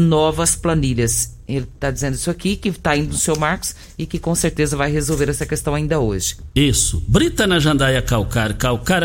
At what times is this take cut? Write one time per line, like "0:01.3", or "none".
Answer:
none